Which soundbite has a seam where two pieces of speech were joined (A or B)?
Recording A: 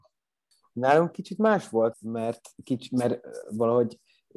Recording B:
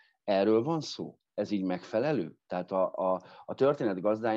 A